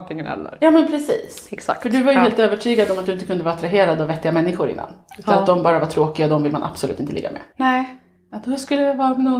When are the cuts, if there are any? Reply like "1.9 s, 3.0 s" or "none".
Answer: 7.5 s